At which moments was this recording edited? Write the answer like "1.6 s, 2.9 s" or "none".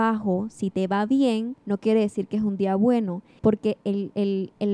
1.6 s, 3.4 s